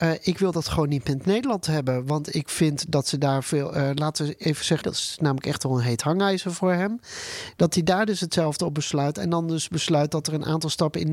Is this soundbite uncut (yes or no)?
no